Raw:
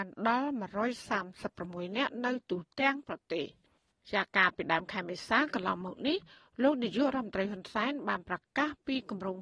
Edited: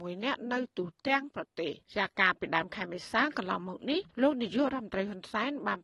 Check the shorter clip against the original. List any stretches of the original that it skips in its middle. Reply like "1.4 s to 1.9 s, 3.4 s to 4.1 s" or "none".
3.6 s to 4.0 s, 6.3 s to 6.5 s